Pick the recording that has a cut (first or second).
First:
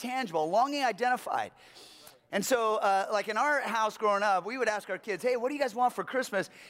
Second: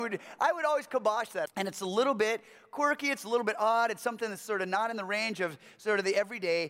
second